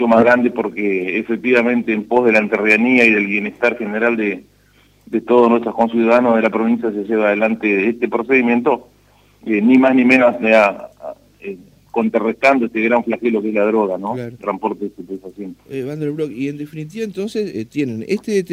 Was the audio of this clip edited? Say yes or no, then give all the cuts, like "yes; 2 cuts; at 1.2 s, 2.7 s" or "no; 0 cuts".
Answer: yes; 1 cut; at 14.4 s